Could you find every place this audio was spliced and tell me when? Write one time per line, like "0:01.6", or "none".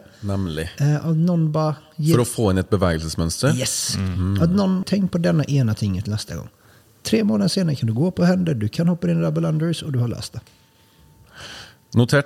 0:04.8